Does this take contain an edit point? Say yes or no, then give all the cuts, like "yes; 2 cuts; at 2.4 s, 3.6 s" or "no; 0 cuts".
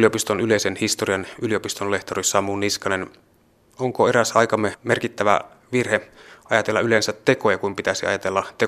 no; 0 cuts